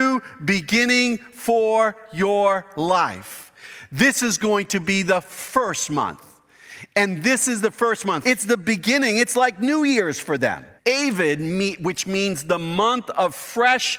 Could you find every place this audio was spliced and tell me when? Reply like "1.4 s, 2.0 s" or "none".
8.2 s, 10.8 s